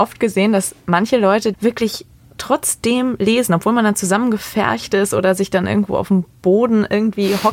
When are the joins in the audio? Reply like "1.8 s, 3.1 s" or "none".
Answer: 1.5 s